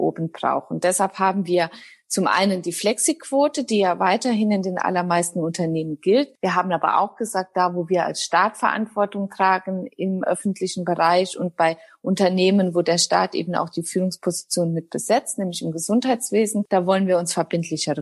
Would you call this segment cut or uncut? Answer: uncut